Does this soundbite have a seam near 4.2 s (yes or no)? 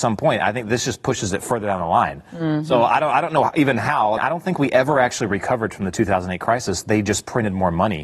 yes